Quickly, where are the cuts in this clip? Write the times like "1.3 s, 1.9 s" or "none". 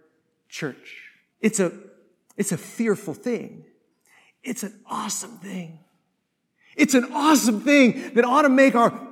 1.3 s